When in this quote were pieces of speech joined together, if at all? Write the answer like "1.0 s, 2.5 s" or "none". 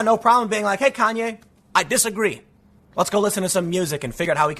none